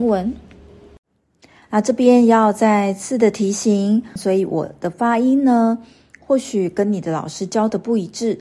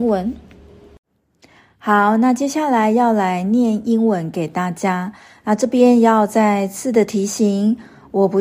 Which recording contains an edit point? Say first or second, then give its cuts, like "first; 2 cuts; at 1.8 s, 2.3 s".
first; 2 cuts; at 1.6 s, 4.2 s